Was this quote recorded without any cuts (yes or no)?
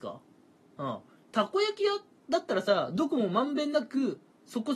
yes